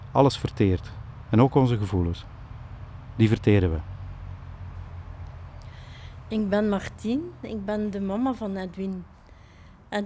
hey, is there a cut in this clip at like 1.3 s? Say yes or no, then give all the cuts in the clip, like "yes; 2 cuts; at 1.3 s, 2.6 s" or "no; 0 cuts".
no; 0 cuts